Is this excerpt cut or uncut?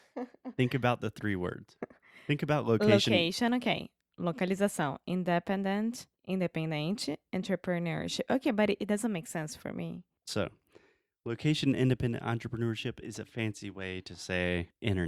cut